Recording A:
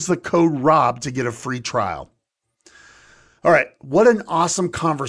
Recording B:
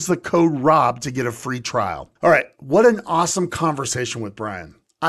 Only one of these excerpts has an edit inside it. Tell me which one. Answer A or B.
B